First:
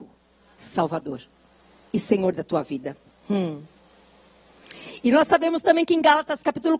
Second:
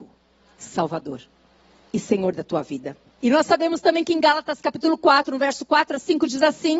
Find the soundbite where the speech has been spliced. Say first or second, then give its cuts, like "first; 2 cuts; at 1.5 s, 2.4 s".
second; 1 cut; at 3.2 s